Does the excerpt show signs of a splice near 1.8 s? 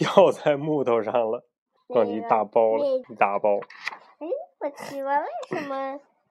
yes; 2 cuts; at 1.8 s, 3.0 s

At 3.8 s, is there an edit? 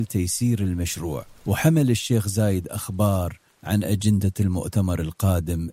no; 1 cut; at 1.4 s

